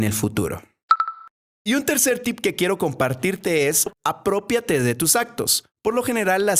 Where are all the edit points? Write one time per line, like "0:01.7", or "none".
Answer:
none